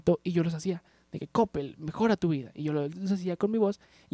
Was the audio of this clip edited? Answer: no; 0 cuts

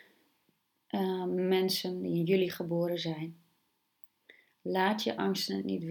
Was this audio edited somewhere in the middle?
no; 0 cuts

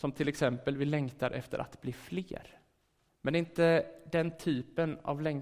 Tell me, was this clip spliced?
yes; 1 cut; at 3.1 s

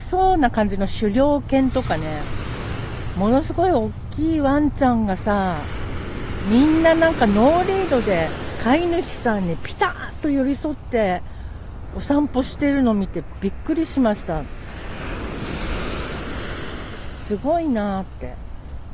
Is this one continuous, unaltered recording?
yes; 0 cuts

